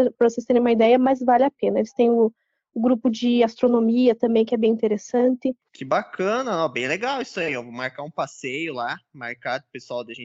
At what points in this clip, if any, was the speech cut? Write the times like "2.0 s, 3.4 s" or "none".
5.6 s